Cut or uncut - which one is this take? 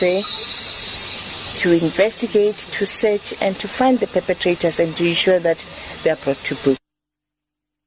uncut